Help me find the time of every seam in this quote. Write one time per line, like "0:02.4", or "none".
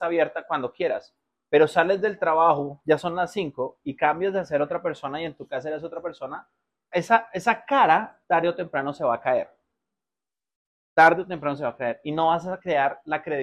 0:06.9
0:08.2